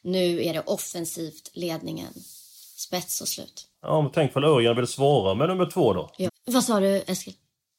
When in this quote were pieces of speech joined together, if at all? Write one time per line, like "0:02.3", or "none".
0:03.7
0:06.3

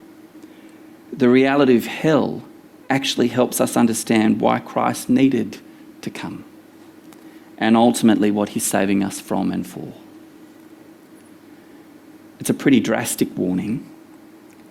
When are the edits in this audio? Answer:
none

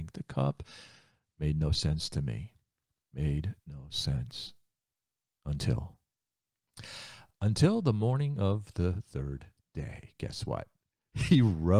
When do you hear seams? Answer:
none

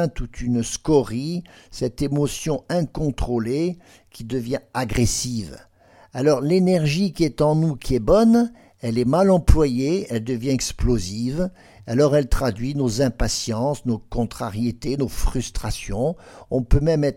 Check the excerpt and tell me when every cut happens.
none

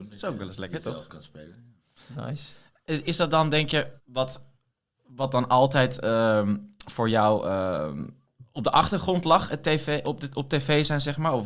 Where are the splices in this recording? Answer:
0:04.0
0:10.0

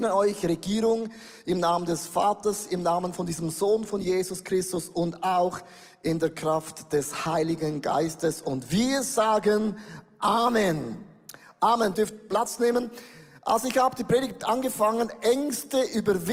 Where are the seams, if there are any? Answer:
0:11.9

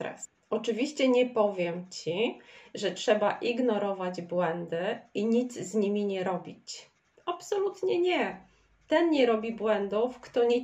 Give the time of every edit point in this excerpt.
0:07.1

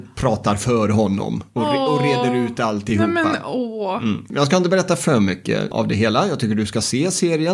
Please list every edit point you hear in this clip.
none

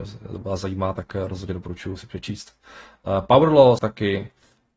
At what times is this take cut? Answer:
0:03.8

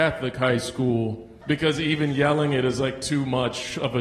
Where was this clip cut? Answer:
0:01.4

